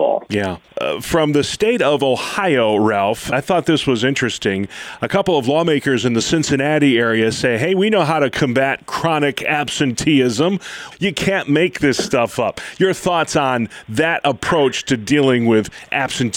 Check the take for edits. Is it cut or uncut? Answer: cut